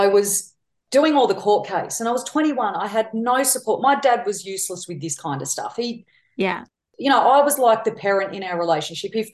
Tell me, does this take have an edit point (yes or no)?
no